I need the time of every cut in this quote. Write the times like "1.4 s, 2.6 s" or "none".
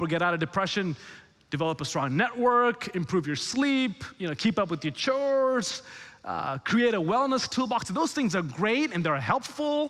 none